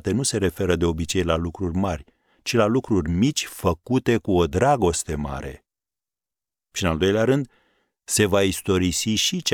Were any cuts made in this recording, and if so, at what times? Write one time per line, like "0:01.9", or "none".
none